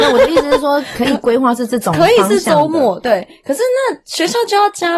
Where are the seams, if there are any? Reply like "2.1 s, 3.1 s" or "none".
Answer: none